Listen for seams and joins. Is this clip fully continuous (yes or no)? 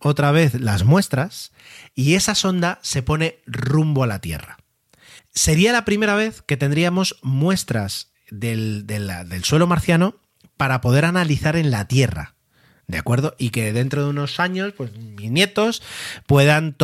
no